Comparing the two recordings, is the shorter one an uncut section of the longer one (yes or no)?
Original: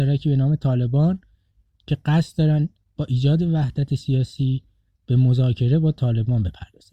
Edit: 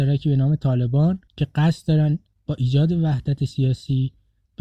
no